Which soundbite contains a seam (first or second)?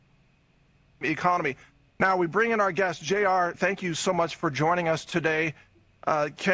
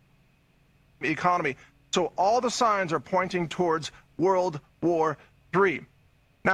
first